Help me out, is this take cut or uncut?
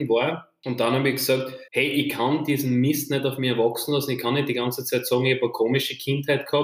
cut